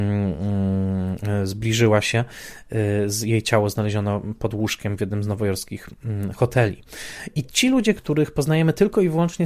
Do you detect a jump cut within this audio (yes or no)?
yes